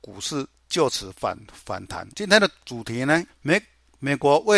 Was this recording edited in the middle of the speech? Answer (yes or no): yes